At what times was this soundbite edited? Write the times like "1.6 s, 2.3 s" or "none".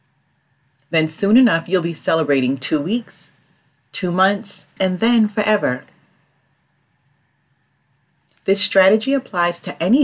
4.8 s